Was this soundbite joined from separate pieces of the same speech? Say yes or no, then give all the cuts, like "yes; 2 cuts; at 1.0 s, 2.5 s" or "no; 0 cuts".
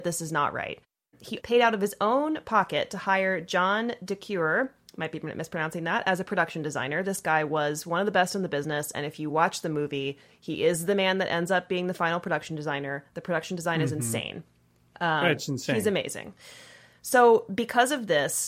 yes; 1 cut; at 1.4 s